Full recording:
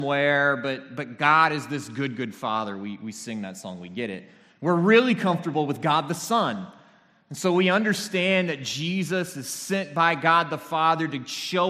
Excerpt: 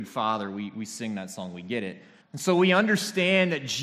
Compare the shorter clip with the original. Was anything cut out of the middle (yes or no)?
yes